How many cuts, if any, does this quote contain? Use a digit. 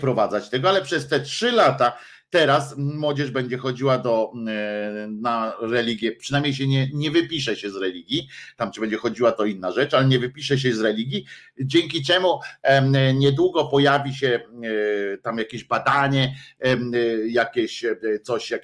0